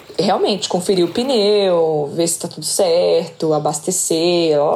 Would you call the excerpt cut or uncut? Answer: uncut